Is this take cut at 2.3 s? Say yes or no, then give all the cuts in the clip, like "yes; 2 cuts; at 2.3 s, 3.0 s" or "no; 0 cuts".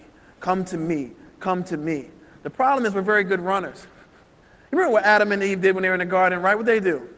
no; 0 cuts